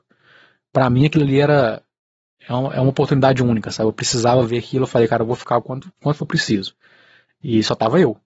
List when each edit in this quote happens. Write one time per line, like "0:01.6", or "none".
0:05.9